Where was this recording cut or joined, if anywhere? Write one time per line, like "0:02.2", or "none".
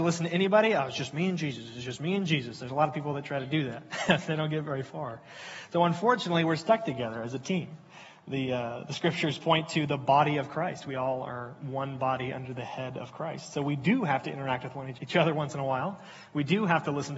0:14.9